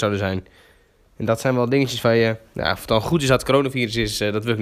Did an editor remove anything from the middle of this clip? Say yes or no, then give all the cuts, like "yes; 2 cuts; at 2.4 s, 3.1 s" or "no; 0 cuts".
no; 0 cuts